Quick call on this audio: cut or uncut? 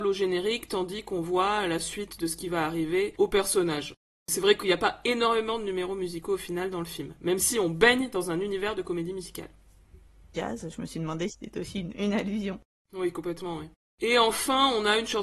cut